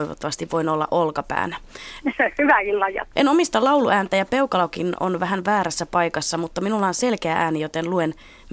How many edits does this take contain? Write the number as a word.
two